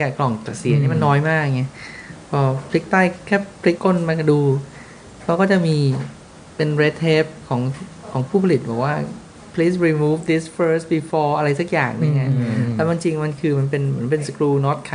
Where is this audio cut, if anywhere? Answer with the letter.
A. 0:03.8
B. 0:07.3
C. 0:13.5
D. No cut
A